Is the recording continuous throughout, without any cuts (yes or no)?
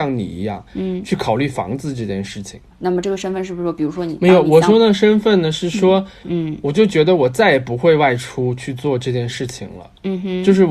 no